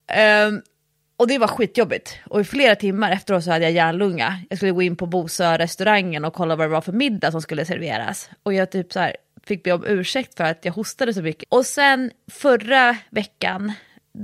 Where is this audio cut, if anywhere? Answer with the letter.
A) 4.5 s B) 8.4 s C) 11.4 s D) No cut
C